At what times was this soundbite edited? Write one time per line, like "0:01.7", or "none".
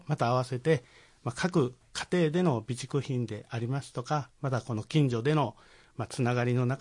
none